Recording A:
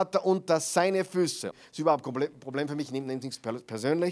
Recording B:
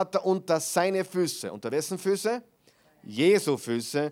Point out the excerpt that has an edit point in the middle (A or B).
A